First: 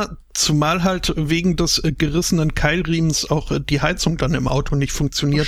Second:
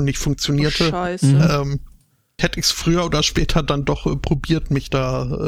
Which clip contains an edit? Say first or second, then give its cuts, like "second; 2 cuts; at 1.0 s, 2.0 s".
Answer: second; 1 cut; at 2.4 s